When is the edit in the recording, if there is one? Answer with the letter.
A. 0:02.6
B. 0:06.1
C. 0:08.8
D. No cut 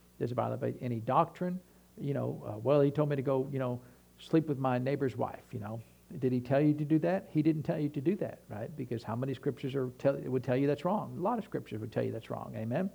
D